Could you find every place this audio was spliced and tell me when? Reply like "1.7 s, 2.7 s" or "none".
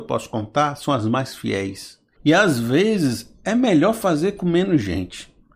2.2 s